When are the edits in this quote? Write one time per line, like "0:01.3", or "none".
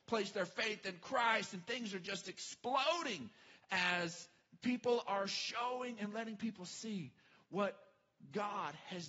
none